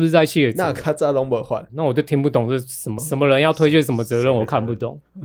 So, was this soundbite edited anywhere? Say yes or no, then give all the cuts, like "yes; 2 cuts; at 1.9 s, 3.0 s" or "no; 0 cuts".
yes; 2 cuts; at 1.7 s, 3.0 s